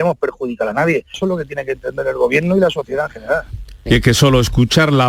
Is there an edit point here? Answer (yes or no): yes